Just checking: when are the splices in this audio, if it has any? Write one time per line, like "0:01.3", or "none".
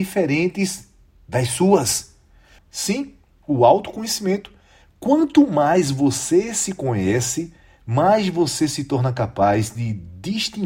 0:02.6